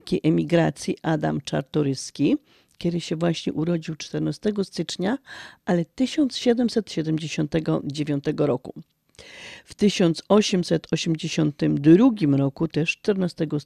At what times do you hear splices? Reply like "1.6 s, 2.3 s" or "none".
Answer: none